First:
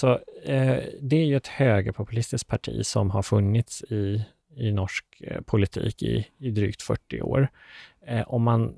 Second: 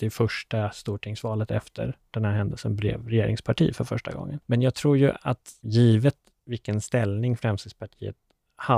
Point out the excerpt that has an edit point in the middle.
second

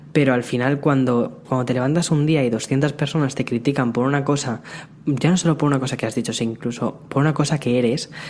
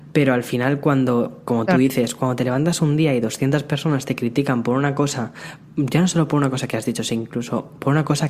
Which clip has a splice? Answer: first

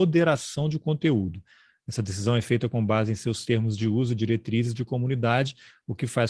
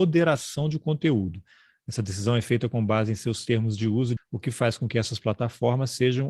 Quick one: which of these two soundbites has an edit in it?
second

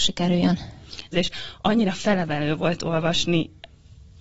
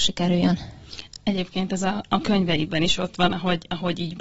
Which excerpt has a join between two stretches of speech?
first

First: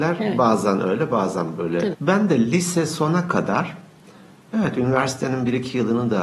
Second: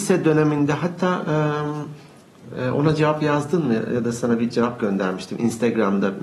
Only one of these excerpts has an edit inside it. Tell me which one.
first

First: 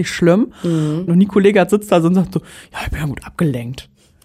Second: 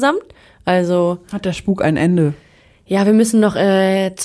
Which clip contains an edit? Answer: first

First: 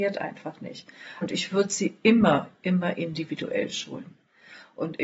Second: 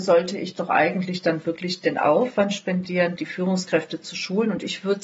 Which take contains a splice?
first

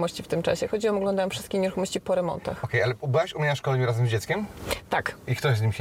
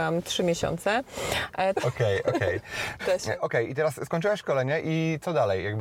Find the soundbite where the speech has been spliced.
second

